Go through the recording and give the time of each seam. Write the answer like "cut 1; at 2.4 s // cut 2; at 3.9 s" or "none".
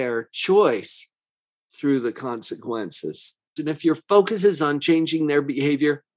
cut 1; at 3.6 s

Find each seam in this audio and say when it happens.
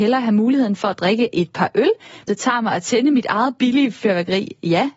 cut 1; at 2.3 s

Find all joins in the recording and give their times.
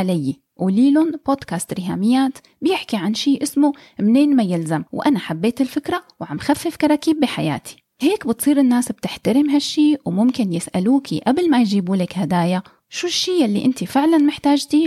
cut 1; at 4.9 s

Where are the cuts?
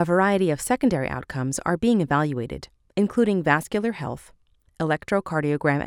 none

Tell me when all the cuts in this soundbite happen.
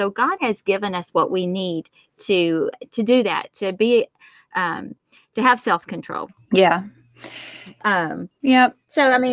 none

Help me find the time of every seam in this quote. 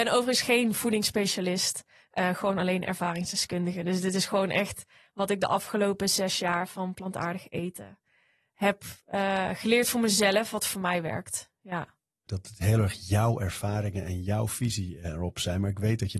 cut 1; at 12.3 s

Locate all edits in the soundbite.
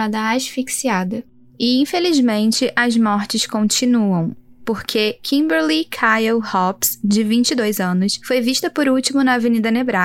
none

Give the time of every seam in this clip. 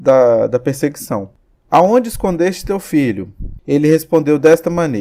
cut 1; at 3.6 s

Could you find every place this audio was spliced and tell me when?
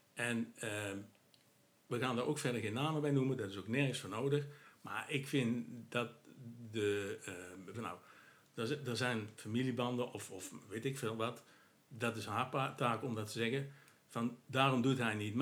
cut 1; at 7.7 s

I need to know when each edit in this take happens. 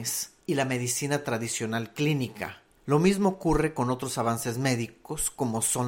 cut 1; at 2.8 s

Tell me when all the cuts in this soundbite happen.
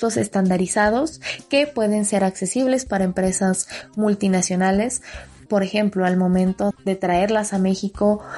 cut 1; at 5.5 s // cut 2; at 6.7 s

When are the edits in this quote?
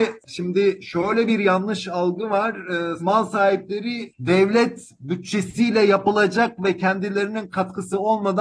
cut 1; at 3.0 s

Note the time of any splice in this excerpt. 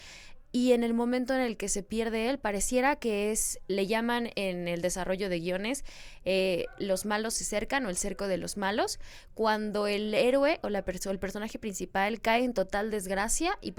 cut 1; at 3.7 s

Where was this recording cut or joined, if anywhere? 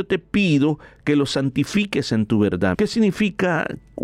cut 1; at 2.7 s

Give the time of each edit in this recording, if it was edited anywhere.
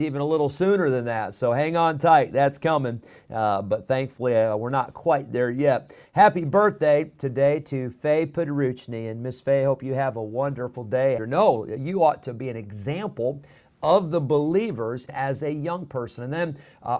cut 1; at 11.2 s // cut 2; at 15.1 s

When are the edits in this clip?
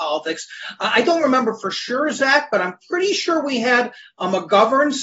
none

